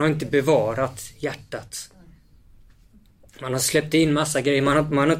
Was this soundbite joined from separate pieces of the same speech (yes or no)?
no